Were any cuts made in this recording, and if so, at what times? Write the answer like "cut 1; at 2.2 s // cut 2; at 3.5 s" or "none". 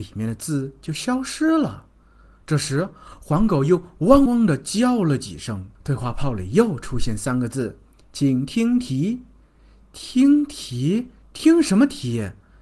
cut 1; at 4.3 s // cut 2; at 5.7 s